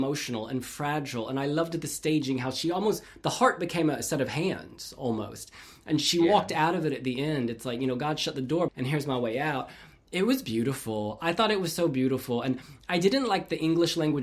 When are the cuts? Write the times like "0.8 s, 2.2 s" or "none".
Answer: 8.7 s